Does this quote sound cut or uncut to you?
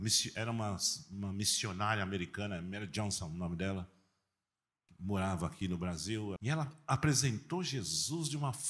cut